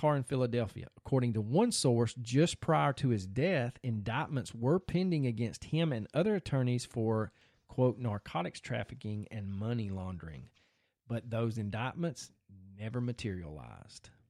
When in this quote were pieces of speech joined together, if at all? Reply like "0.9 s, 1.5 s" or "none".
none